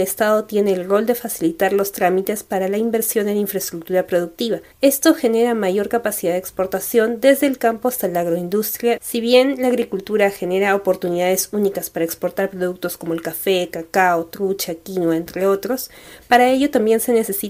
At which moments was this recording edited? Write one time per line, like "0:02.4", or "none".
0:04.7
0:09.0